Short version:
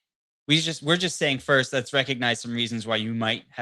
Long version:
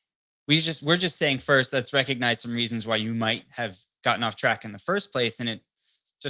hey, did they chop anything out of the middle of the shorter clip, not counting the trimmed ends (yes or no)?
no